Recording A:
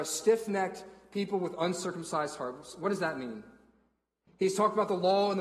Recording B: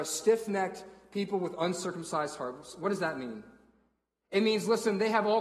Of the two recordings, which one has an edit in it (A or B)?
A